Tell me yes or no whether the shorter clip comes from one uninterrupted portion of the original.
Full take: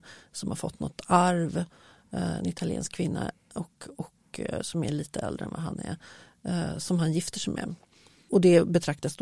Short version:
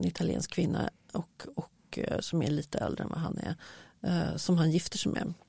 yes